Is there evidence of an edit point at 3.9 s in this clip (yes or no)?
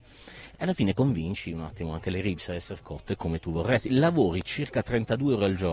yes